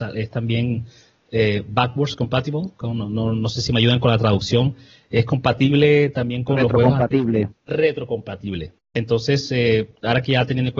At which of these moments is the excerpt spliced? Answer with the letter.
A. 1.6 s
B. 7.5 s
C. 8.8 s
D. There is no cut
C